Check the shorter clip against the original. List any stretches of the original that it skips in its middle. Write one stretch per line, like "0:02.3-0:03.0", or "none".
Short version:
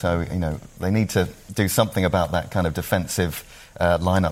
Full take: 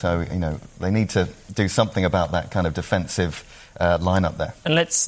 none